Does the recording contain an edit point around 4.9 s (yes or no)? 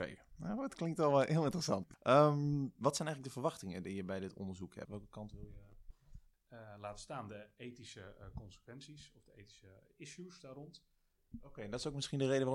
yes